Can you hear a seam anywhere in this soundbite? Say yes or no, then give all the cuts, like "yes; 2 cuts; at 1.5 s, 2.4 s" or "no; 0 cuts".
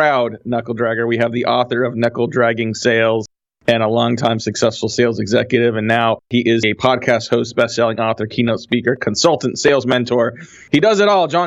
no; 0 cuts